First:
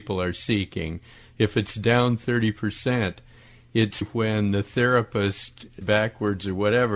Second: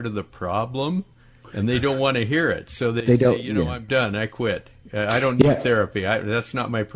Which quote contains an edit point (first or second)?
first